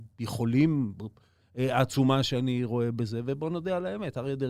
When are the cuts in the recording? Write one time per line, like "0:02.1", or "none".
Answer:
0:01.4